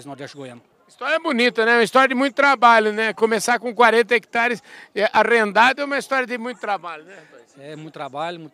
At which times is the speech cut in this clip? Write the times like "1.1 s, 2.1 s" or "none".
none